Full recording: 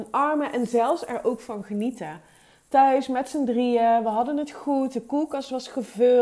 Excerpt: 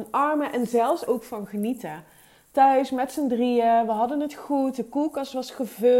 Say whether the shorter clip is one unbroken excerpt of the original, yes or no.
no